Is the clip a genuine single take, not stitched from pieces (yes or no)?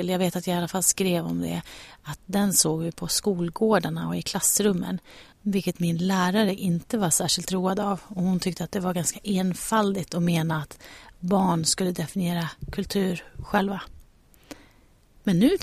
no